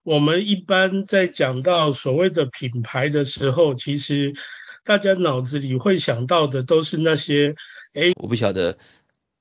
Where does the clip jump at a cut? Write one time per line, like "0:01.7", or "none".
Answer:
0:08.1